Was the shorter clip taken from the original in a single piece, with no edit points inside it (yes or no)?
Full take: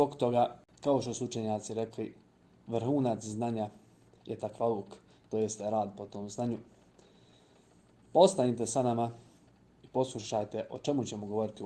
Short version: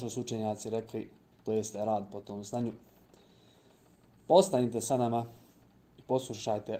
no